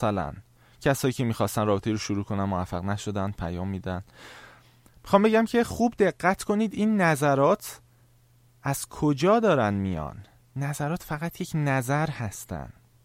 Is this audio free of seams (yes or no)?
yes